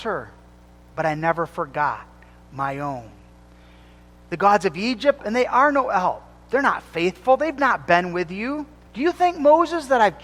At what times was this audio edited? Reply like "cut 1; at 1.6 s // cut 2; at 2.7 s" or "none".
cut 1; at 5.2 s // cut 2; at 8.9 s